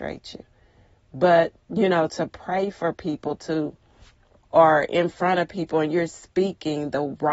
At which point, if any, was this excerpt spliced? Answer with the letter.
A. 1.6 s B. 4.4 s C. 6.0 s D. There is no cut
B